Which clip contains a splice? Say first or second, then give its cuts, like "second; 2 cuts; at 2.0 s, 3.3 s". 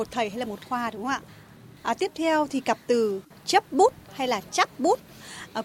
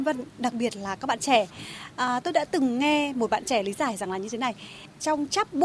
first; 1 cut; at 1.8 s